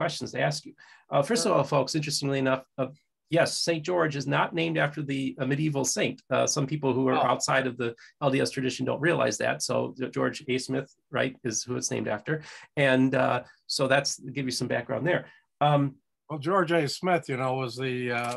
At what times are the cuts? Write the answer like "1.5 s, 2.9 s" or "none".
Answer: 10.4 s